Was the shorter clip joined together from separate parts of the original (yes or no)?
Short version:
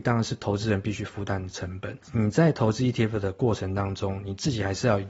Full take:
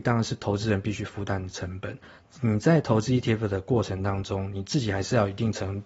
yes